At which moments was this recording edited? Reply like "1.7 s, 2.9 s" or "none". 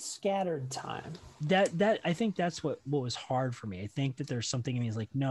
none